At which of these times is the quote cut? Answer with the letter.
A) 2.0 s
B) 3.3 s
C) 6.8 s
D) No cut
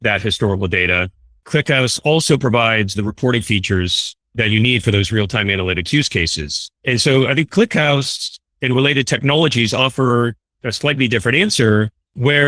C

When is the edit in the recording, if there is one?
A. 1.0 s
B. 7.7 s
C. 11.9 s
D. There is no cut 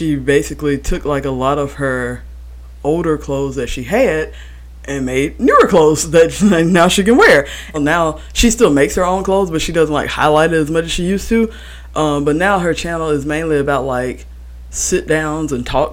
B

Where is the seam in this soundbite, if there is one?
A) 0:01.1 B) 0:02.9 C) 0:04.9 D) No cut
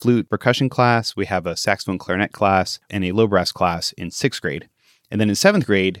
B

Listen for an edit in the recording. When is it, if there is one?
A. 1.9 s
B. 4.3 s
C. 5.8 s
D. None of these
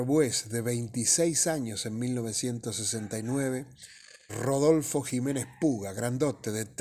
B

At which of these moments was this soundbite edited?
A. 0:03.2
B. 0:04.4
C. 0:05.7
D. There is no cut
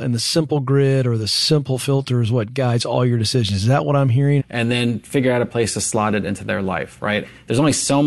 B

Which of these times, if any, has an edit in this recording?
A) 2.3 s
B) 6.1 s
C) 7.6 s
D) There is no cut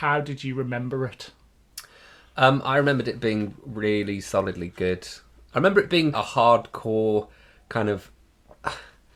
B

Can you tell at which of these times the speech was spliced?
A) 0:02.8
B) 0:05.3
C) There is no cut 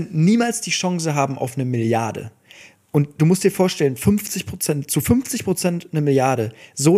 C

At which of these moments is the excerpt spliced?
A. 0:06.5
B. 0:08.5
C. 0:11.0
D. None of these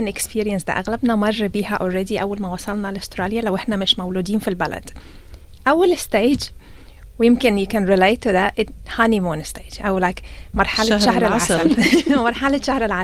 D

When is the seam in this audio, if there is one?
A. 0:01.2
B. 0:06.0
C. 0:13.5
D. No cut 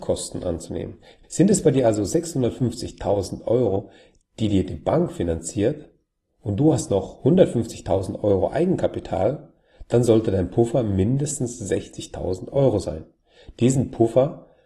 A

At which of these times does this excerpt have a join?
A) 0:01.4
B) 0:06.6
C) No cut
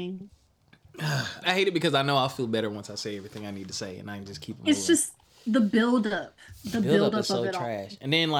A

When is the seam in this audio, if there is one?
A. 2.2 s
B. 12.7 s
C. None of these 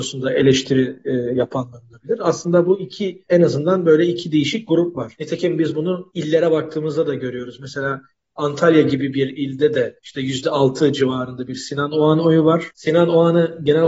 B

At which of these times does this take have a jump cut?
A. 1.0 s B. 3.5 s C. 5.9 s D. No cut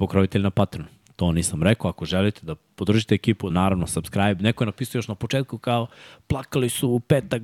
B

